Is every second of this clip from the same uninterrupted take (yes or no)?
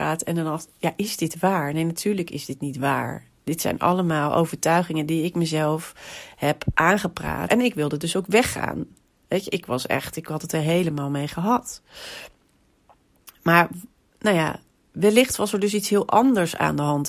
no